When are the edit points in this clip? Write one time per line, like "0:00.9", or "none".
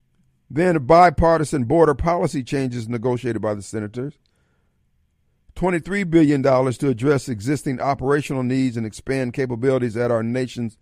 none